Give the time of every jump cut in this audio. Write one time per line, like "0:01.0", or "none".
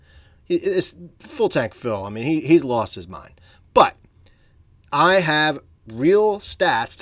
none